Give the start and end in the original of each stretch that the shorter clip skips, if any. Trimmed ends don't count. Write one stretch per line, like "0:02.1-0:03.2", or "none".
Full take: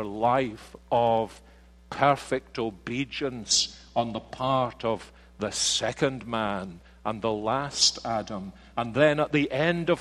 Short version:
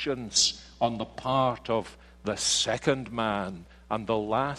none